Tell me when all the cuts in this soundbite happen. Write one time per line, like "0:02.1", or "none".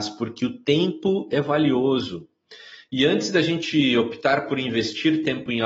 none